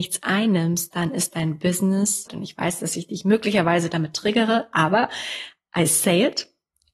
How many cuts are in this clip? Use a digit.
1